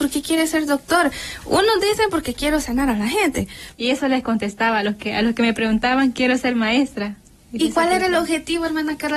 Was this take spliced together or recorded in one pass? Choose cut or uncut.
cut